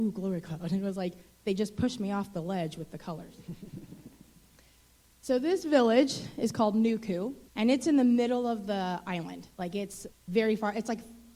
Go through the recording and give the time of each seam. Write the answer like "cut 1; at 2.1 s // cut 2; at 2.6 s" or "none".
cut 1; at 7.5 s // cut 2; at 10.1 s